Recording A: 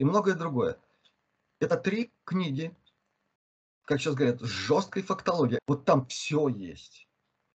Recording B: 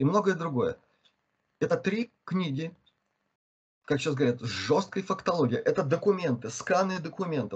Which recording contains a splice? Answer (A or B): A